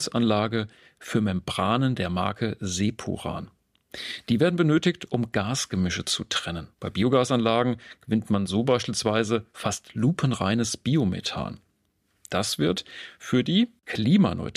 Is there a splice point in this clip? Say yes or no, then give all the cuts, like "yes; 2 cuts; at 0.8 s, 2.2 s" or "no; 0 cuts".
yes; 1 cut; at 6.7 s